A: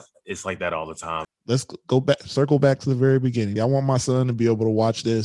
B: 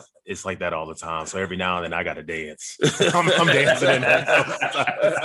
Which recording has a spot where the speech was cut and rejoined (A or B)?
A